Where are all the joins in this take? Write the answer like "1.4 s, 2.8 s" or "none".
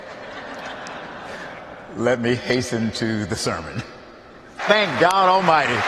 4.6 s